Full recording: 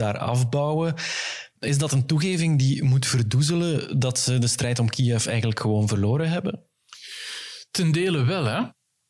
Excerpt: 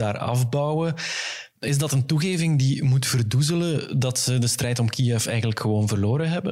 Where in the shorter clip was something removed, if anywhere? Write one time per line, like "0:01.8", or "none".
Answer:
none